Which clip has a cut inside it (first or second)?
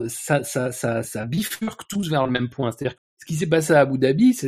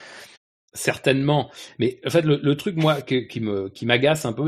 first